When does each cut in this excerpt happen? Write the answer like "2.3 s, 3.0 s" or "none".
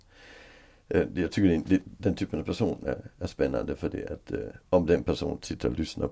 1.8 s